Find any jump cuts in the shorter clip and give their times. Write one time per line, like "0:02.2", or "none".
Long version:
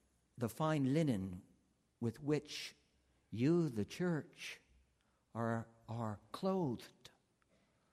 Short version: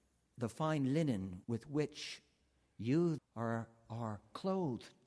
0:01.4
0:03.2